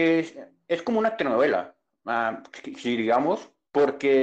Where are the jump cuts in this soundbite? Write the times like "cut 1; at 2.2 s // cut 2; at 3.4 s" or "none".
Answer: none